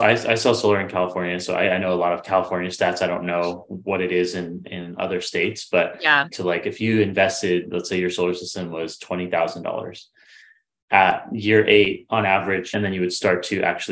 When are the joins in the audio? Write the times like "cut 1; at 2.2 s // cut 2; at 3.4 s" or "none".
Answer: cut 1; at 6.3 s // cut 2; at 12.7 s